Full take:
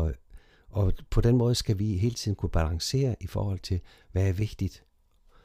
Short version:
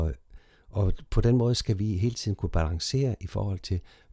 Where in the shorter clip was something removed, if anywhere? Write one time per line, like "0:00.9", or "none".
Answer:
none

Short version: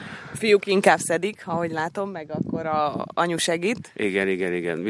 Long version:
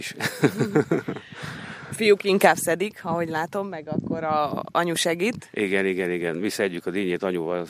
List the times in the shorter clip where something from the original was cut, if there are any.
none

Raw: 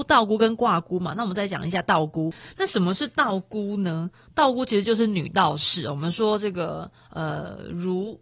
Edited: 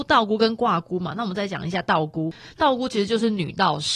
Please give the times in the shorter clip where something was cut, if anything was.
0:02.6

